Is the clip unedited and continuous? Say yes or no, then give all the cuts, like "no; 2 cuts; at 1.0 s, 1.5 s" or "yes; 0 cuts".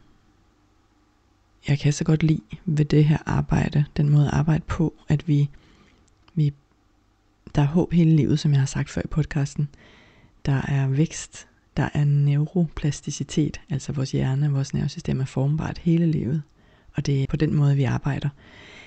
no; 1 cut; at 17.3 s